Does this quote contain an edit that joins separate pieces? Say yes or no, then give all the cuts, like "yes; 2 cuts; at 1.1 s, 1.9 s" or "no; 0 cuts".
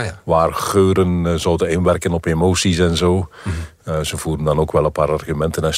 no; 0 cuts